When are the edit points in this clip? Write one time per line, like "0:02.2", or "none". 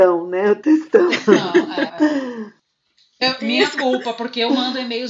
0:01.9
0:03.2